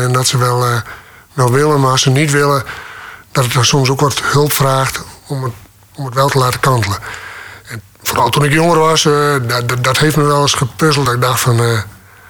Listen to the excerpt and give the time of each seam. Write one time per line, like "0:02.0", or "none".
none